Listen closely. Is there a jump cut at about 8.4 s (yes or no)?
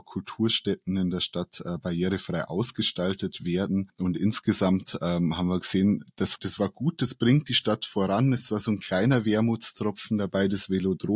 no